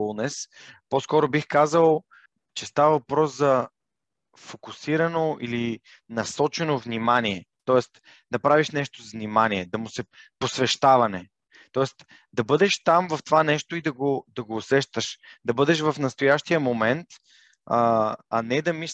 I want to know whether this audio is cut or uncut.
uncut